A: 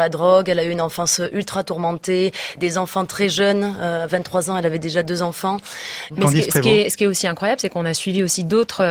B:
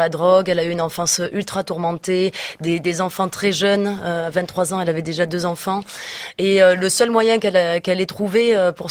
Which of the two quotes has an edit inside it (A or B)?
A